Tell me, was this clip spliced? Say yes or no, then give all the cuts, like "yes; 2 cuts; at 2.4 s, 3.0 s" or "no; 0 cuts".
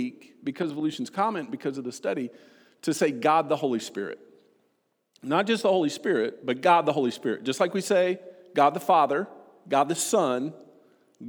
no; 0 cuts